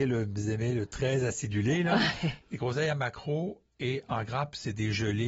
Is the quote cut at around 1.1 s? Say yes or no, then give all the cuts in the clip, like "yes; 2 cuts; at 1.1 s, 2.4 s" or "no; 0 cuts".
no; 1 cut; at 2.4 s